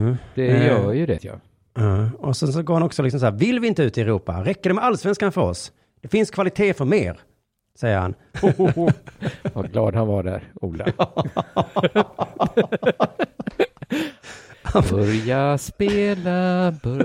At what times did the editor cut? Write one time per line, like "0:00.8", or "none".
0:01.2
0:08.3